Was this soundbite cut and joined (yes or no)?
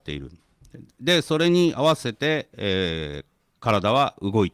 no